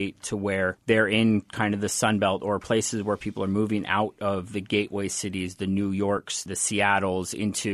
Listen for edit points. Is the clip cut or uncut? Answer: uncut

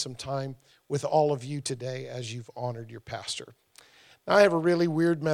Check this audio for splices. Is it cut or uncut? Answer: uncut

